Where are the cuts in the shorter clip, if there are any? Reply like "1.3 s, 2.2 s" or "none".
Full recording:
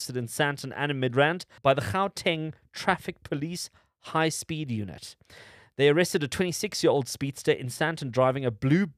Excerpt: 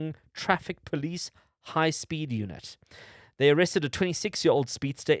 none